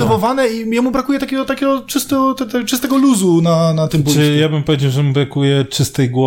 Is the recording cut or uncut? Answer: uncut